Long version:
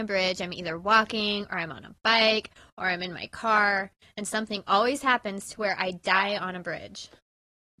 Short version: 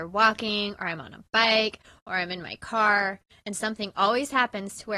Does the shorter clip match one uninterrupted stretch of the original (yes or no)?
yes